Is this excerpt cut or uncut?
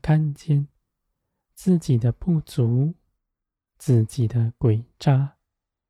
uncut